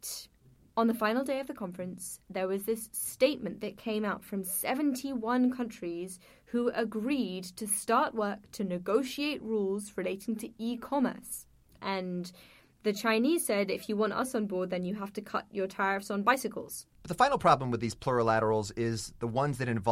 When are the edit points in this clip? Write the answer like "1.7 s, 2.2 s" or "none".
11.8 s, 16.9 s